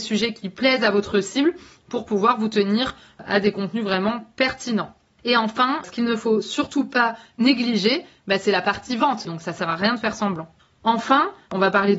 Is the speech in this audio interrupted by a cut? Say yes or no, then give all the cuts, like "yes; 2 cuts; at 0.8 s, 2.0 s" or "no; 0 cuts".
yes; 2 cuts; at 5.8 s, 9.2 s